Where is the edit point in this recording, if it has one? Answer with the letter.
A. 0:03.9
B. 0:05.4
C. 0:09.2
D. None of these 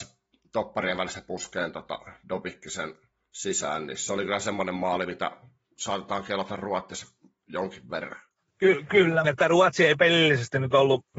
C